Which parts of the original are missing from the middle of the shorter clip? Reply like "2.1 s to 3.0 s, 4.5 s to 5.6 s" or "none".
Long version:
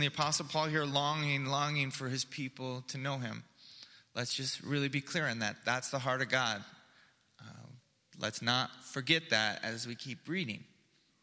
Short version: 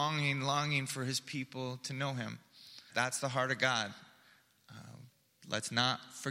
3.9 s to 5.6 s